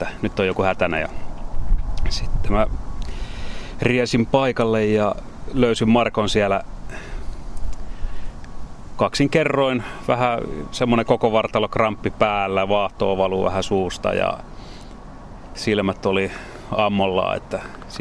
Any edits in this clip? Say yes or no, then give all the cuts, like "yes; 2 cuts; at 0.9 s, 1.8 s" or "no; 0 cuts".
no; 0 cuts